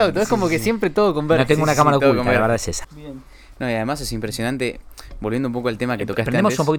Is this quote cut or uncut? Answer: cut